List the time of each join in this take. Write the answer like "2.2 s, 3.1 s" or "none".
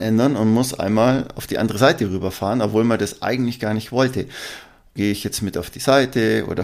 5.0 s